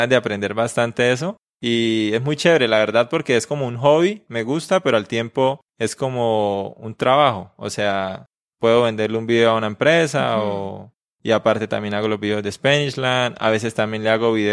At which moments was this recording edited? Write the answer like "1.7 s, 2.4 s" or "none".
none